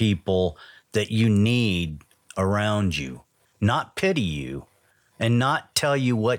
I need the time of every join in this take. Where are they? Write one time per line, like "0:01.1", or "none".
0:03.4